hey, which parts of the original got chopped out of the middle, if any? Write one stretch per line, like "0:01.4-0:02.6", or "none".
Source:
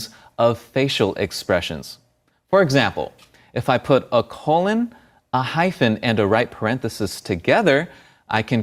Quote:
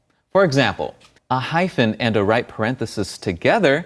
0:03.3-0:05.2

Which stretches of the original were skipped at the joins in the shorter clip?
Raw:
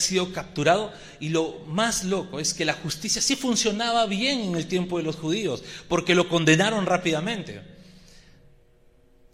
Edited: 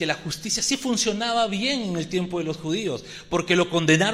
none

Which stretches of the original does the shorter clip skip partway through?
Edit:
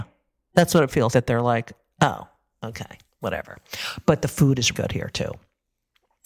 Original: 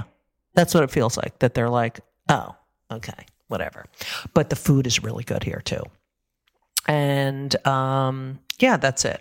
0:01.1-0:01.4
0:05.0-0:05.2

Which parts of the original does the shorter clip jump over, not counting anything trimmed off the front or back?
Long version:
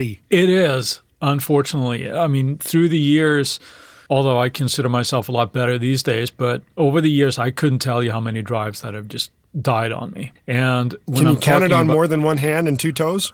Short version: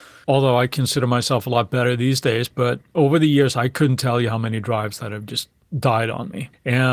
none

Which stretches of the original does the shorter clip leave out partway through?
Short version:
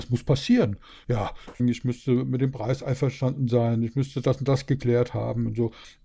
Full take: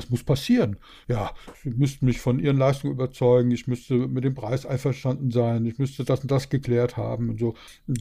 0:01.6-0:03.4

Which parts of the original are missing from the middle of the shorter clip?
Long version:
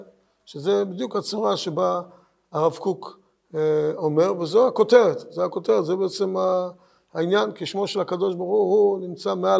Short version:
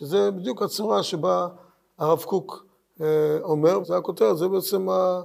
0:04.4-0:05.3

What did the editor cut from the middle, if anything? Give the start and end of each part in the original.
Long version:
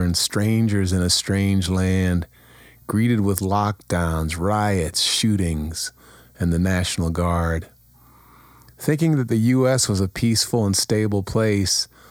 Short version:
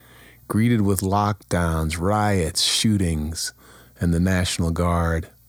none

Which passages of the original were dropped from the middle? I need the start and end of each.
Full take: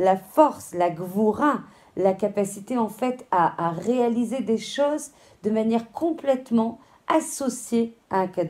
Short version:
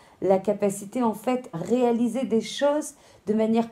0:03.3-0:03.7

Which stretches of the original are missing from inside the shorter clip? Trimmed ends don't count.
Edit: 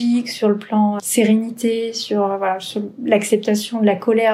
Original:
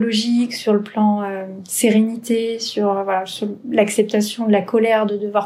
0:01.2-0:01.6

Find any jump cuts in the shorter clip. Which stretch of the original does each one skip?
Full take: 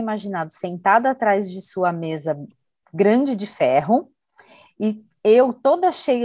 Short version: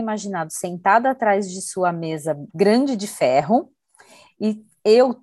0:02.5-0:02.9

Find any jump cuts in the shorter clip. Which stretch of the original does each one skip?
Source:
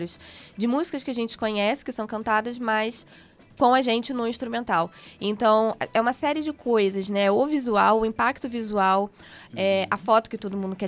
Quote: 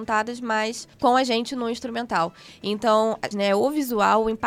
0:03.1-0:03.5
0:05.9-0:07.1

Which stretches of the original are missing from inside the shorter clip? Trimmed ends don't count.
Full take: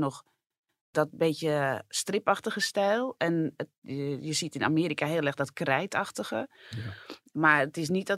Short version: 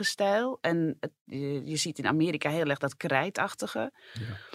none

